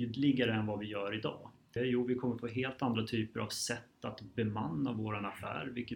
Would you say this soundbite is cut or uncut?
cut